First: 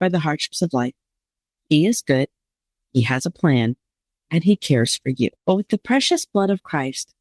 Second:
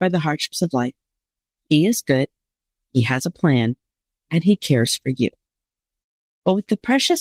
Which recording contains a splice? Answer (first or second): first